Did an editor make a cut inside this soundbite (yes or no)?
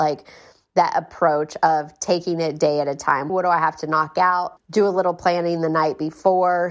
yes